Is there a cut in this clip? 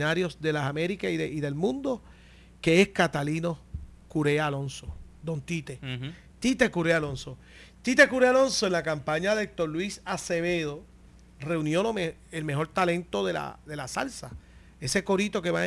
no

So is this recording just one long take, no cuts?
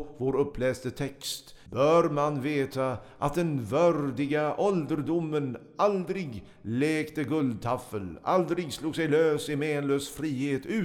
no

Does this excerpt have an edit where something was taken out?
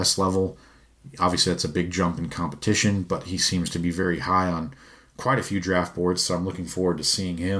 no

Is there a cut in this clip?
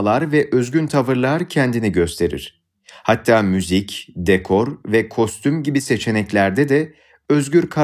no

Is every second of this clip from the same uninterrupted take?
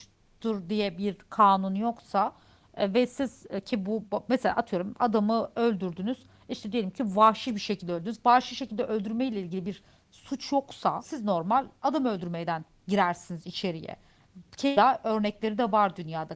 yes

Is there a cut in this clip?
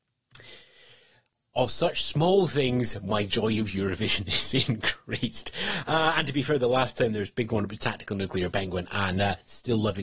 no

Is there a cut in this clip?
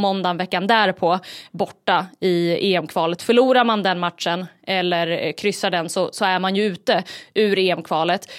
no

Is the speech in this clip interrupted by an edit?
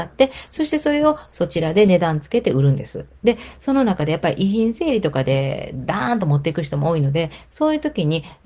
no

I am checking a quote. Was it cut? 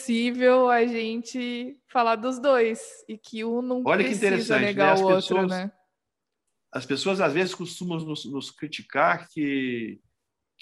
no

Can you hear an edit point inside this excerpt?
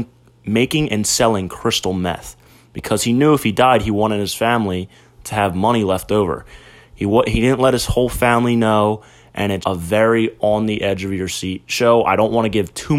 yes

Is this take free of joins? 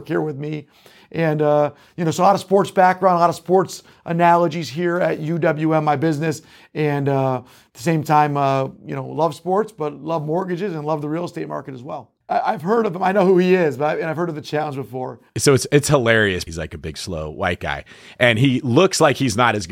no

